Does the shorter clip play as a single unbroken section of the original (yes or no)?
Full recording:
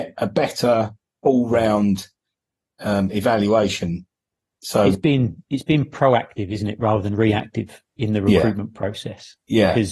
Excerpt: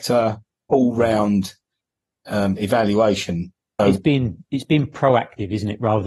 no